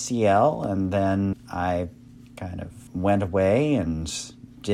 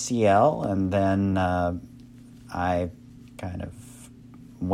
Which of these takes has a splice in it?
first; 2 cuts; at 1.3 s, 2.9 s

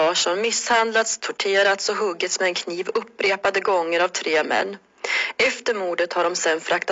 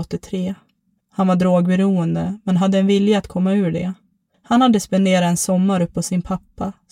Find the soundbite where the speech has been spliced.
second; 1 cut; at 1.0 s

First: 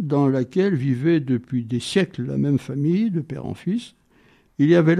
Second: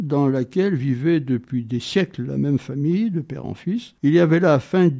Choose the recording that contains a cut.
second; 1 cut; at 4.0 s

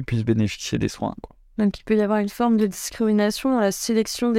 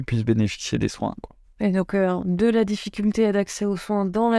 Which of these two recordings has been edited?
second; 1 cut; at 1.4 s

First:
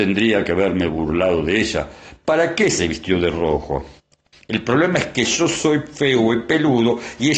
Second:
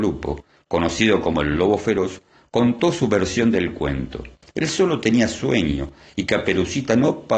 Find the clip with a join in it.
first; 2 cuts; at 2.2 s, 4.3 s

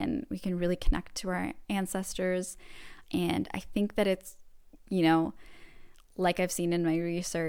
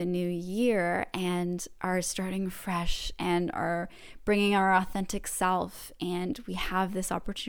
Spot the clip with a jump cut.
first; 1 cut; at 3.0 s

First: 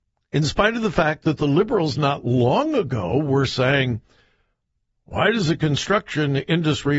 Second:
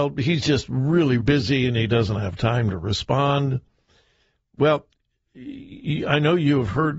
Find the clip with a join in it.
second; 1 cut; at 1.2 s

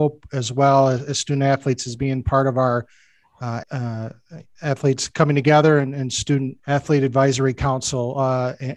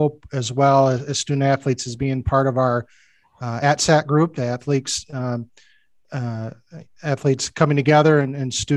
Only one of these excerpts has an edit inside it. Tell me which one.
first; 2 cuts; at 3.6 s, 6.6 s

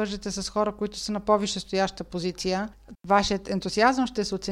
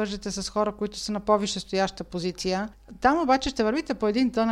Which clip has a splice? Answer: first; 1 cut; at 2.9 s

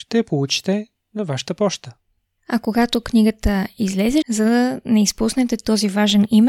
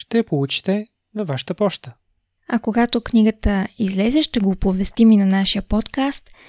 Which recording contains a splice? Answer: first; 1 cut; at 4.2 s

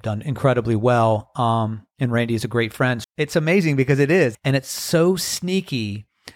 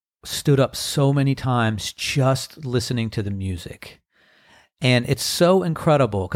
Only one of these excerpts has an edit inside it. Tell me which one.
first; 2 cuts; at 3.0 s, 4.3 s

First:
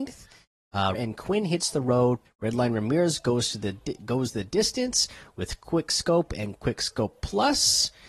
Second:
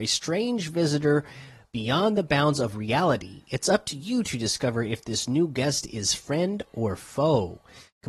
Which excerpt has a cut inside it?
first; 2 cuts; at 0.9 s, 2.2 s

